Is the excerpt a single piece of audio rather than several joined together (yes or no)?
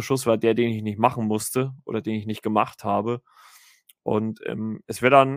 yes